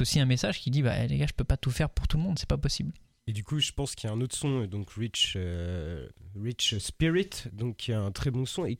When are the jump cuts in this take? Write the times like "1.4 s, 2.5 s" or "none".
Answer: none